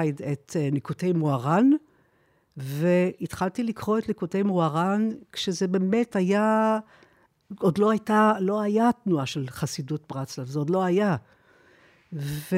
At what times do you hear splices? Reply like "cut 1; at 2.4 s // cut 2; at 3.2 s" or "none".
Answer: none